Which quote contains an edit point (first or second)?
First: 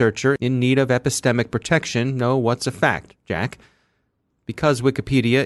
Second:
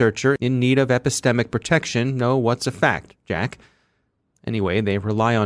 first